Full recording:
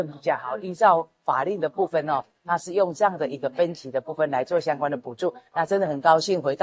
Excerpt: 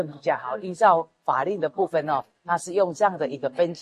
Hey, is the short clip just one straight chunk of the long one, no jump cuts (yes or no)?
yes